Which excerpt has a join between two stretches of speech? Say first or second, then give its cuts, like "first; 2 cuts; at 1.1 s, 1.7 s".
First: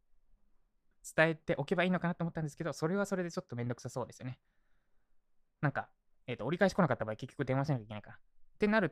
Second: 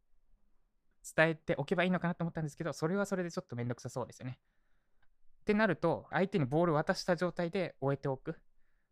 second; 2 cuts; at 5.0 s, 6.1 s